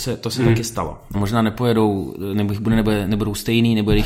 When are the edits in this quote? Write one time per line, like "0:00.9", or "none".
0:01.1